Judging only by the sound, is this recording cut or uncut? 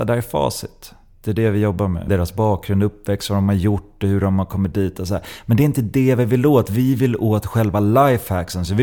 cut